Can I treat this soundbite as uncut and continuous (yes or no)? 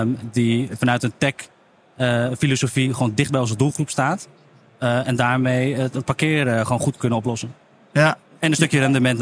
yes